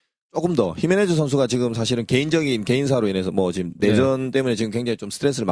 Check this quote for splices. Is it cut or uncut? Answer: uncut